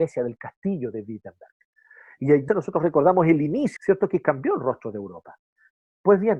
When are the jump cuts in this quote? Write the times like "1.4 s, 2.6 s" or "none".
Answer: 2.5 s, 3.8 s